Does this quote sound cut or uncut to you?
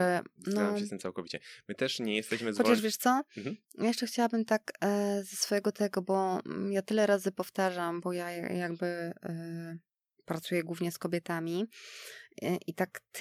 uncut